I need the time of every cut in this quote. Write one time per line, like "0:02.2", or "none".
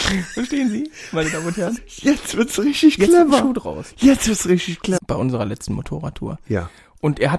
0:01.8
0:05.0